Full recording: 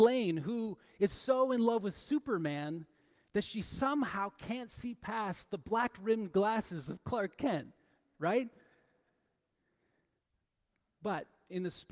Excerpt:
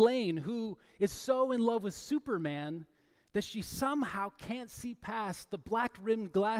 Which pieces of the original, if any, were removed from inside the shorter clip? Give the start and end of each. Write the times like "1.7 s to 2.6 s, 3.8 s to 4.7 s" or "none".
none